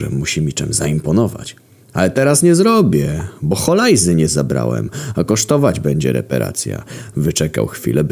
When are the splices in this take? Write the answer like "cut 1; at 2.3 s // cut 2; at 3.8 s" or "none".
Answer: none

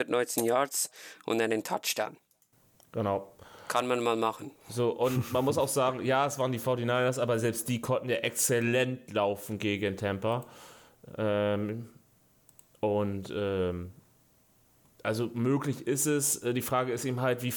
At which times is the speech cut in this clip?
none

